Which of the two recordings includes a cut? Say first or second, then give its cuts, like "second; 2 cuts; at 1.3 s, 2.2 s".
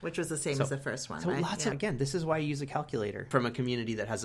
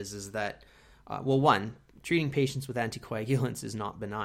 first; 2 cuts; at 1.7 s, 3.3 s